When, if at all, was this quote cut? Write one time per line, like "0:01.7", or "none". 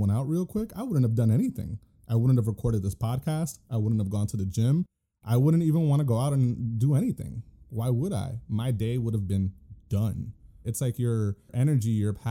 0:08.4
0:10.6